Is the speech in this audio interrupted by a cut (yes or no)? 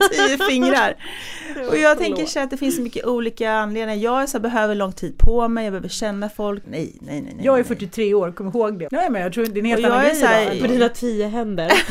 yes